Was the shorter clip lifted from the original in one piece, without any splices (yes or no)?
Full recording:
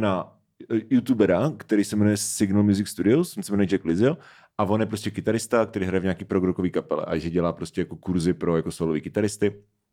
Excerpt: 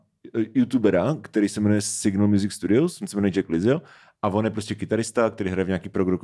yes